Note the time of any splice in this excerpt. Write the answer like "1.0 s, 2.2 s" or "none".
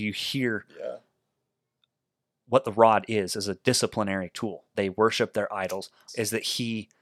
4.7 s, 6.1 s